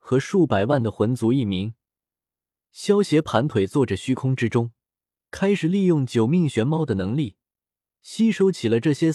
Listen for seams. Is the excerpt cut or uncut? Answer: cut